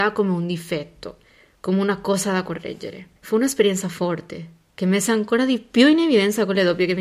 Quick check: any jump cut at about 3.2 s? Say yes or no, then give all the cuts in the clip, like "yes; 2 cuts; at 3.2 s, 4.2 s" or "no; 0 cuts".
yes; 1 cut; at 3.2 s